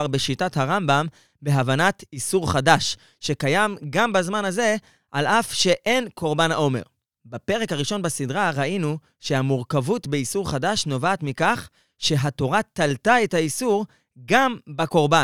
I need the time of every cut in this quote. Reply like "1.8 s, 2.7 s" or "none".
7.2 s